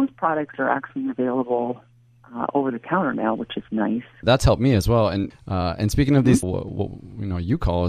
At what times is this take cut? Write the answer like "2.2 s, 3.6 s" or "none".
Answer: 4.2 s, 5.3 s, 6.4 s